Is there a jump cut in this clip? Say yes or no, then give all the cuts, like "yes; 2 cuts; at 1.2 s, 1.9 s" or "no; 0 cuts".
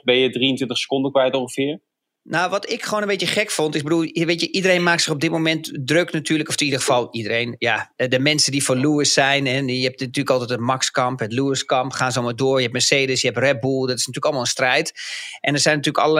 no; 0 cuts